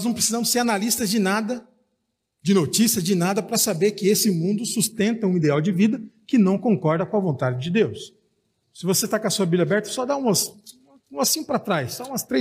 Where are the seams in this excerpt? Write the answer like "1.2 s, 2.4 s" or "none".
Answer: 8.6 s